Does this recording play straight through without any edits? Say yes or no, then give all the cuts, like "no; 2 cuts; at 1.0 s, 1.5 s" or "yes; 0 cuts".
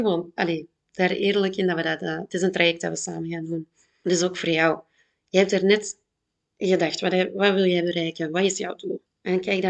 yes; 0 cuts